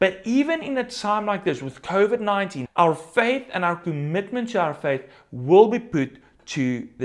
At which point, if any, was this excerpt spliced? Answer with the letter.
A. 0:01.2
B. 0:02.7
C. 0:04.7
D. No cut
B